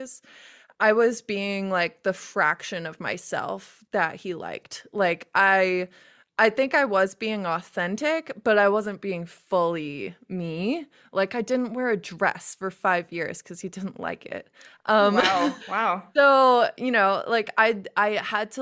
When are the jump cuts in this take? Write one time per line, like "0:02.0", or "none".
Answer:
0:15.6

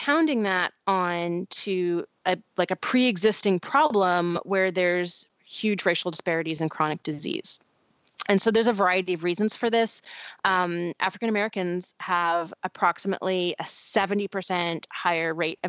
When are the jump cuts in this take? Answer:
0:10.4

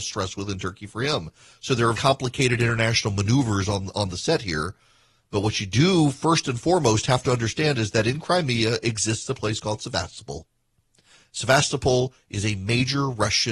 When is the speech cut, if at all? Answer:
0:01.9

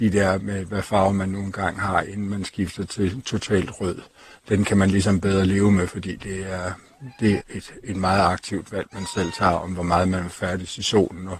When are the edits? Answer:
0:07.4

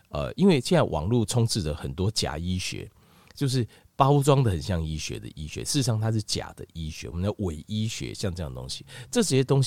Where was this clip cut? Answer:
none

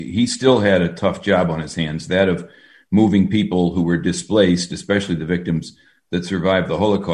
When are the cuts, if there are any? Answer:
none

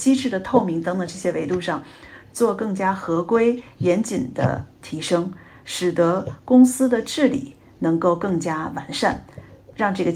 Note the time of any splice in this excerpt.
none

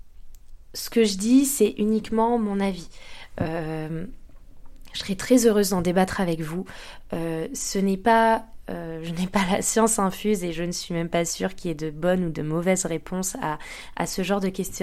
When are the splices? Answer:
none

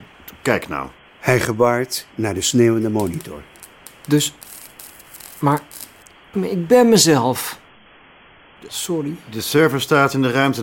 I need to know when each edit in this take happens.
0:06.3
0:08.7

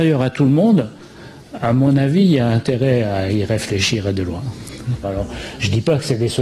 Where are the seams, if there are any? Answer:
0:05.0

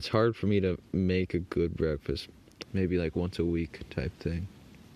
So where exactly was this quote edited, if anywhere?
0:02.6

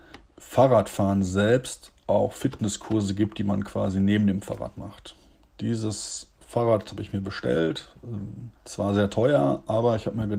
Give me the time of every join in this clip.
0:08.6

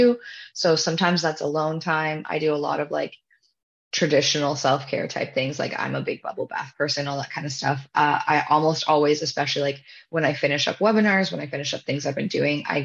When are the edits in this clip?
none

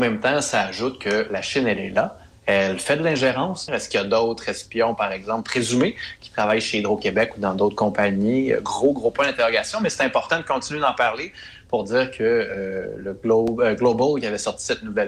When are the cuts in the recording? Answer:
0:03.7

